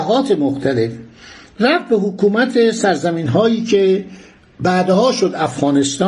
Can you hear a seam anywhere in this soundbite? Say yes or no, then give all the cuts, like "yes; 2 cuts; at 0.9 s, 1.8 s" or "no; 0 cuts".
no; 0 cuts